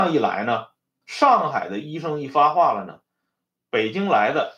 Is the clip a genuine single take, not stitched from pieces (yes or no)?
no